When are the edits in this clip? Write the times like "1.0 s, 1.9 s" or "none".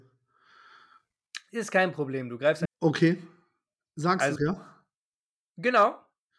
2.6 s, 4.4 s